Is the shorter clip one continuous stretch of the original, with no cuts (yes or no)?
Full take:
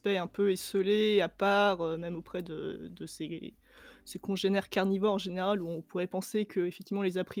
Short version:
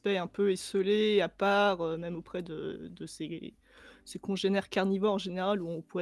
yes